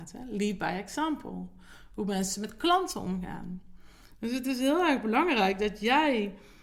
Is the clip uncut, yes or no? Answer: yes